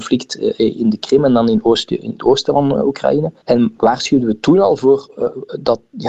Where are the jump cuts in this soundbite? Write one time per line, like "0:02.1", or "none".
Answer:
0:03.4